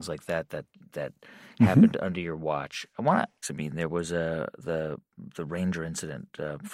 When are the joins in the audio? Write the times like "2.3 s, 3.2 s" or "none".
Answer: 3.4 s